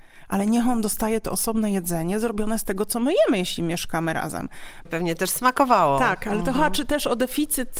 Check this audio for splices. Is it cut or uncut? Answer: cut